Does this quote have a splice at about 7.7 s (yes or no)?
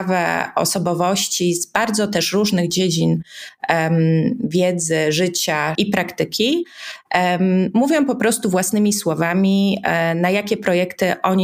no